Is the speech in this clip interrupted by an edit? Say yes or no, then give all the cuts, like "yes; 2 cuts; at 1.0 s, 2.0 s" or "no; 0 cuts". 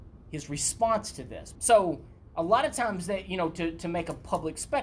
yes; 1 cut; at 1.6 s